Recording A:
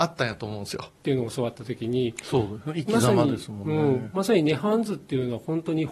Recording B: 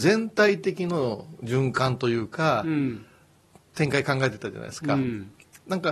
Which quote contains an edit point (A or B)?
A